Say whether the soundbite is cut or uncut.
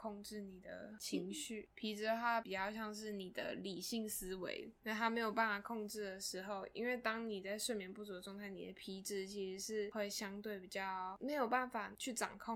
uncut